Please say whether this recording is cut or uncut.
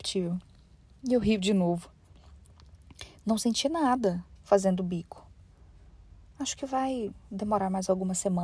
cut